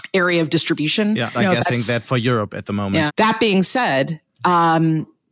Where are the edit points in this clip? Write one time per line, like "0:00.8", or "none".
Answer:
0:01.3
0:03.1